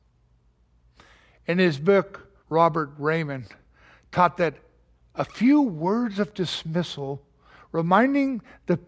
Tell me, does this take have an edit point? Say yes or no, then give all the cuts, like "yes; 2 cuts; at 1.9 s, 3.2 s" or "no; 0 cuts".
yes; 1 cut; at 2.4 s